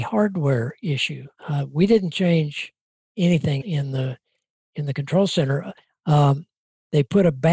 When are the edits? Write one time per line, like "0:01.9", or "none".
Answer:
0:01.4
0:03.6
0:05.9